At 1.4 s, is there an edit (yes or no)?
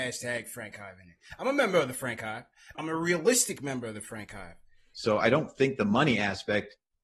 no